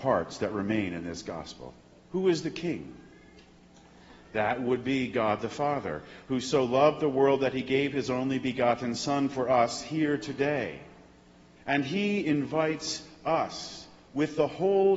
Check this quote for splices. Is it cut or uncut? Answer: cut